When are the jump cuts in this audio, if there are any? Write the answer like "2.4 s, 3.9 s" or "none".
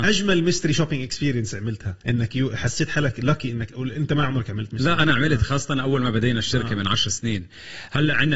2.0 s